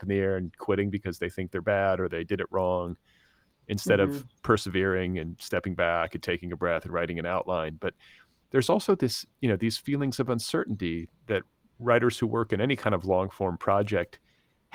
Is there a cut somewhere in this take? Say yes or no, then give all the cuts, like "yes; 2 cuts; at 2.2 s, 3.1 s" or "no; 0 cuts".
no; 0 cuts